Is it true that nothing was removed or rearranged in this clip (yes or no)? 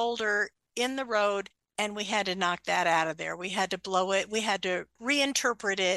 yes